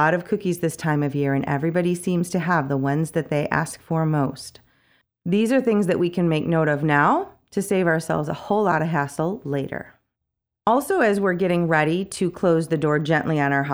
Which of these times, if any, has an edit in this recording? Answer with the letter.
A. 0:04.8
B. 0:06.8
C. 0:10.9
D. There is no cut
D